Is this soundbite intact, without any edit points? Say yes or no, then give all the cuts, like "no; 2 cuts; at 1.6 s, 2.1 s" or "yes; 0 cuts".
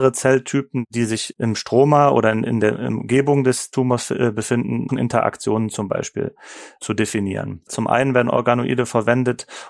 no; 2 cuts; at 4.9 s, 7.7 s